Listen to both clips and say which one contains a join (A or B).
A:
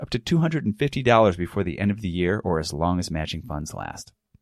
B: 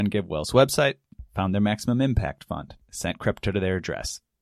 B